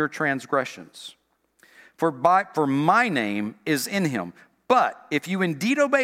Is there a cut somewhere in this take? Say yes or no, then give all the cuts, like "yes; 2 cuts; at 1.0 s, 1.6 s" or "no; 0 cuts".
no; 0 cuts